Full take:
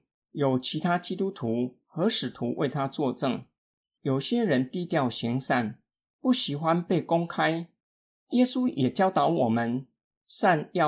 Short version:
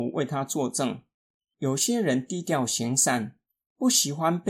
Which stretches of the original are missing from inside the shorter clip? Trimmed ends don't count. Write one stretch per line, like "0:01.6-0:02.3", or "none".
none